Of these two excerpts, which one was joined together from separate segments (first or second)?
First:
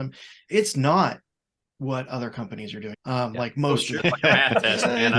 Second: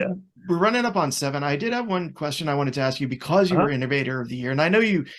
first